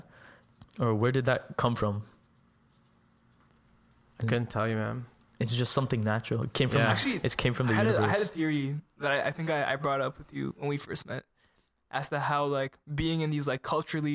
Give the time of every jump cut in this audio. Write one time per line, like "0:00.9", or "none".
0:12.8